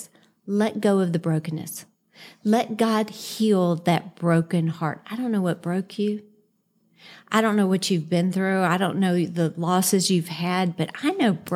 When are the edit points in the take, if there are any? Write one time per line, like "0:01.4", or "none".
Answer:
none